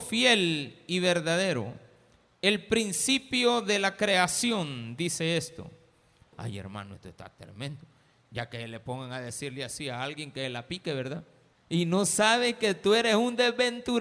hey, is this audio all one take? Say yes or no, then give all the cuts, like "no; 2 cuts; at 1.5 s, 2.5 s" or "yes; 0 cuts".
no; 2 cuts; at 6.3 s, 11.5 s